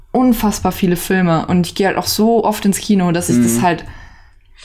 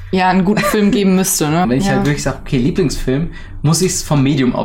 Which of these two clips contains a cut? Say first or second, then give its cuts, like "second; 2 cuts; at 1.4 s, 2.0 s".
second; 1 cut; at 1.6 s